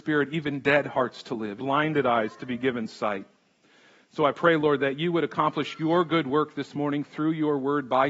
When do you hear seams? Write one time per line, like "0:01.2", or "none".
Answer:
0:01.6